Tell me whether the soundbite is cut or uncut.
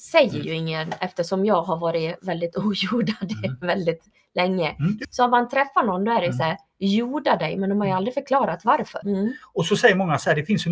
cut